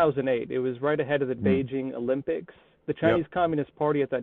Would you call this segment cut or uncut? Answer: uncut